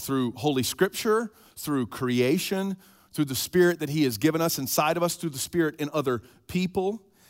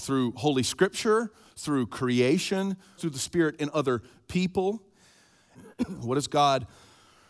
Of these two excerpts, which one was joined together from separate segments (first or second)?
second